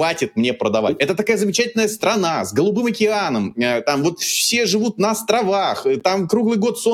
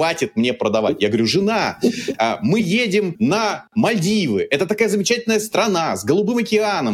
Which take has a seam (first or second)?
first